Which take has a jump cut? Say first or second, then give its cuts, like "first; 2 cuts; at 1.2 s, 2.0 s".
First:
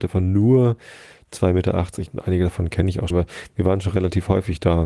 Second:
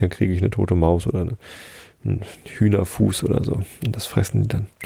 first; 2 cuts; at 2.1 s, 3.1 s